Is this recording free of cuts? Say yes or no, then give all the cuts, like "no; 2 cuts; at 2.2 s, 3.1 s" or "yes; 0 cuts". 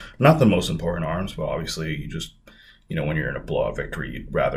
yes; 0 cuts